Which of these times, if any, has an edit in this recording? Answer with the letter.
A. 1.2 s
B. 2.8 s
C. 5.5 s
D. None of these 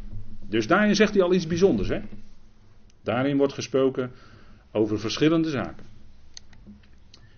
B